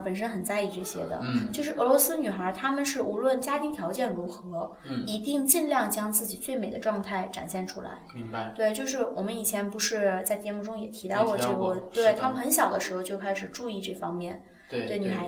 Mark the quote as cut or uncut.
uncut